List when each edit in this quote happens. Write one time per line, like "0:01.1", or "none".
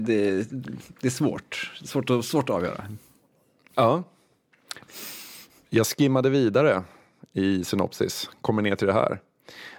0:04.8